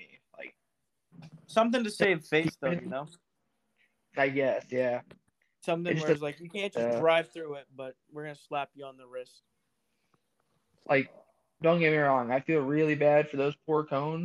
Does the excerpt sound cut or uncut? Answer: uncut